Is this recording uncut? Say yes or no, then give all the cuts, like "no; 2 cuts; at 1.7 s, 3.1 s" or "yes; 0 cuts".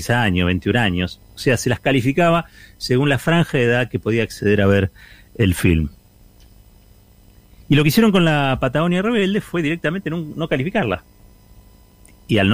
yes; 0 cuts